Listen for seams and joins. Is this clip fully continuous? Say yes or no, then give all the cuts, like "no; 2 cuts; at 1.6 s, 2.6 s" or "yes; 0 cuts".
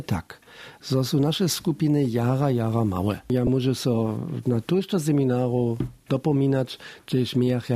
yes; 0 cuts